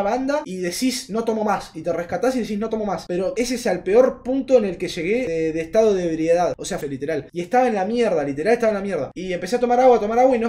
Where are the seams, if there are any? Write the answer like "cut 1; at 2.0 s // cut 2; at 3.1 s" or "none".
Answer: cut 1; at 6.8 s